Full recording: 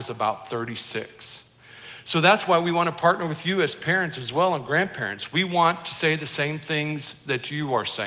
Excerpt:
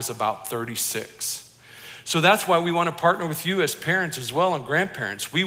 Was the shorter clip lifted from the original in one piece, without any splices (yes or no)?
yes